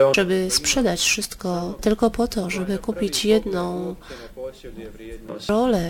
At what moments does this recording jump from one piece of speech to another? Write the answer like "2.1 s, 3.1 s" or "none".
1.8 s